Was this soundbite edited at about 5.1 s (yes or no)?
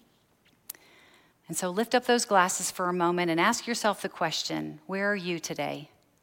no